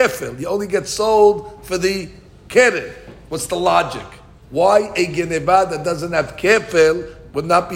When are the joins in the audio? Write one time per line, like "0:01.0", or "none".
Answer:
0:04.4